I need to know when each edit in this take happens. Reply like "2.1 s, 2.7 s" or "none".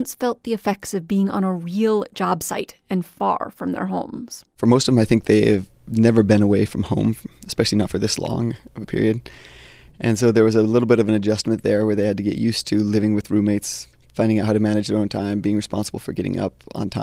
5.7 s